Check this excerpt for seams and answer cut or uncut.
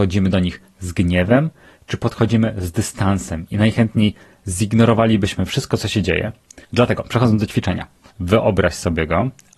cut